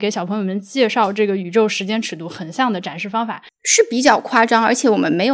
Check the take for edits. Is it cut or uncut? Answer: cut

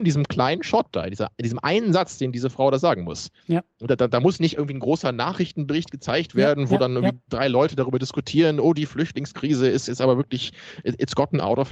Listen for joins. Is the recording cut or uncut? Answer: cut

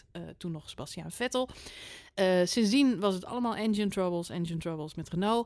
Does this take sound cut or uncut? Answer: uncut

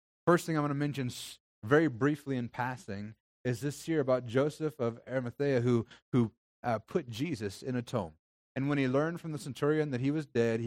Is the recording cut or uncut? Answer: cut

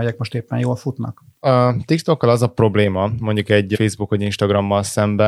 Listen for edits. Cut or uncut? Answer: uncut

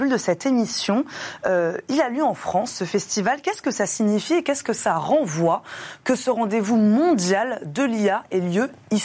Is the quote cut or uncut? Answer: uncut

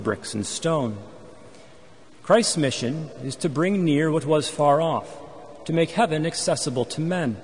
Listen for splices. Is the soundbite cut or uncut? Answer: cut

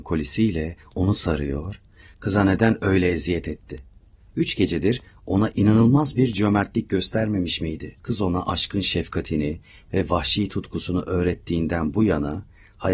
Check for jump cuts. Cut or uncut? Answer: cut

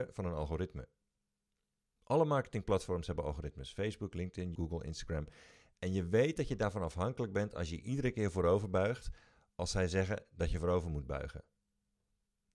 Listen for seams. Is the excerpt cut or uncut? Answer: cut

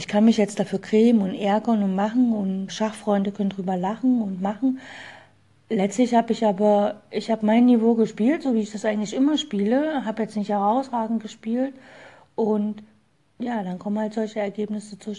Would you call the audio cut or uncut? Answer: cut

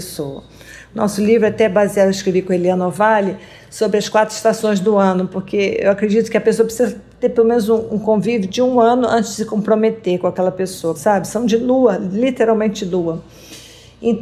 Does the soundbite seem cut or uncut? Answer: cut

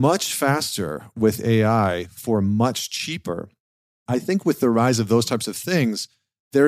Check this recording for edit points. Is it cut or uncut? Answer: uncut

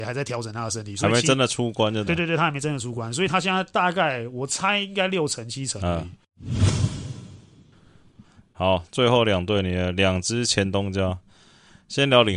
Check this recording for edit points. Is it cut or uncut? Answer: cut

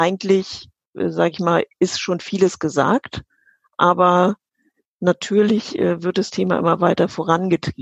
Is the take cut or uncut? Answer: uncut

